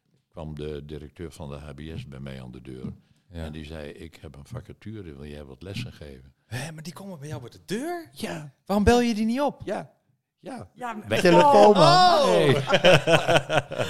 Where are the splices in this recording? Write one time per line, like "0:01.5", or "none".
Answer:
0:11.2